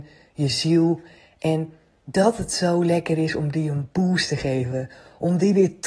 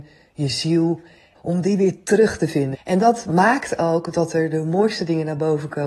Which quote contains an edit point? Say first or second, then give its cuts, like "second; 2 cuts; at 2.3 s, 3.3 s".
second; 2 cuts; at 1.3 s, 2.7 s